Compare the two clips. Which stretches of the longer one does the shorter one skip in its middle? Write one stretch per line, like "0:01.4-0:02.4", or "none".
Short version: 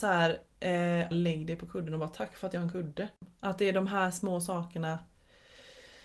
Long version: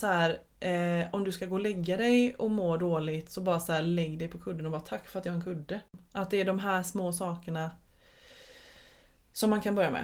0:01.1-0:03.8